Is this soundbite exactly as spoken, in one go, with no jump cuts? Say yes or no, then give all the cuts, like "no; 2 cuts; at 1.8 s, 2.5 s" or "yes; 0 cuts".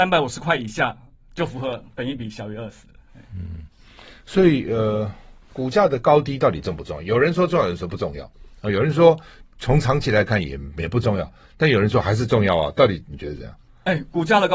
yes; 0 cuts